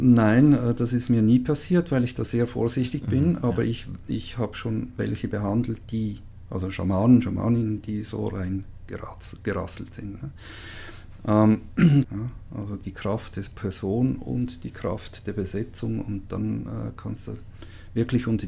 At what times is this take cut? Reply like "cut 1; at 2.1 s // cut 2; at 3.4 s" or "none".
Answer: cut 1; at 12.0 s